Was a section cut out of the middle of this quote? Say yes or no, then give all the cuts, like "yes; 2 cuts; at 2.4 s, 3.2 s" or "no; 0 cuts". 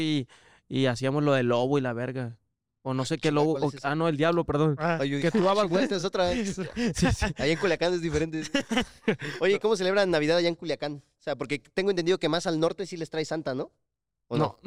no; 0 cuts